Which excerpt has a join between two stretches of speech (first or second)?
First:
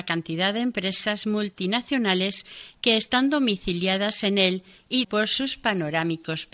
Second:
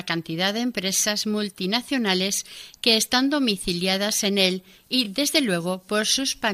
first